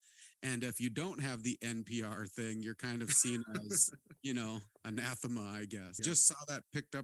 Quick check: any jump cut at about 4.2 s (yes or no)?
no